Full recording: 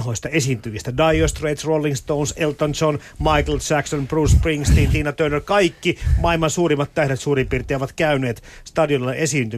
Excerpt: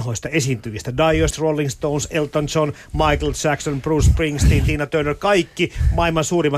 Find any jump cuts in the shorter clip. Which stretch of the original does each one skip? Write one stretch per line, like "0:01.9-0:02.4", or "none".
0:01.3-0:01.6